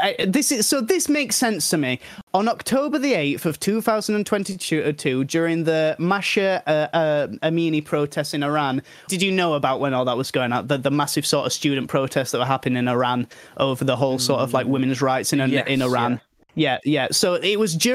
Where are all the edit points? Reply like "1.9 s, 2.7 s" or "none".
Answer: 6.9 s, 9.1 s